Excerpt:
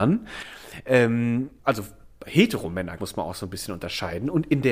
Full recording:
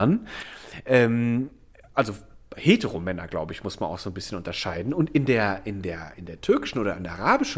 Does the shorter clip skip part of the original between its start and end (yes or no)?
yes